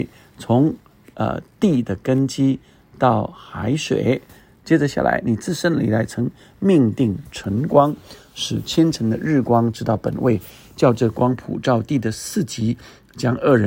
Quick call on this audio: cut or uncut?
uncut